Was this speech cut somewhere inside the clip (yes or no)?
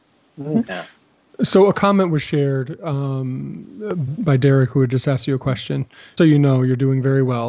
yes